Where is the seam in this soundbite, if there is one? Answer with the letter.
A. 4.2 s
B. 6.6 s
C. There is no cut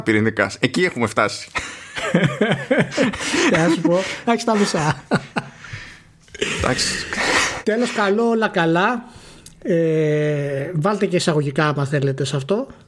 A